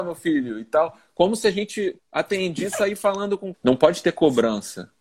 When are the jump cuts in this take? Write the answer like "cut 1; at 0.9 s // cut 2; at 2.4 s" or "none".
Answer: cut 1; at 2.0 s // cut 2; at 3.5 s